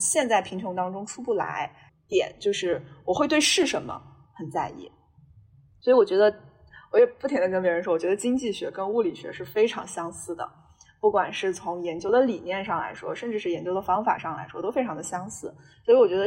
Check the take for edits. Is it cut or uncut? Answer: cut